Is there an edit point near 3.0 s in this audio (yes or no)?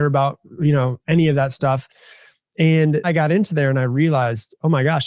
yes